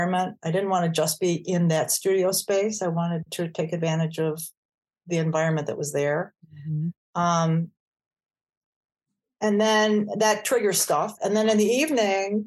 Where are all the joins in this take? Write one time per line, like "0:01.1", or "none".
0:11.2